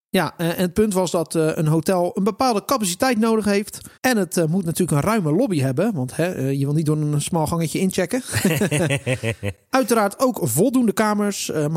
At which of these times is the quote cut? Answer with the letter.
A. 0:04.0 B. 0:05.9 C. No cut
A